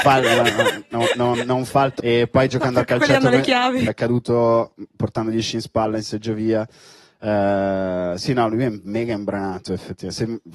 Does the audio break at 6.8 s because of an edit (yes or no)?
no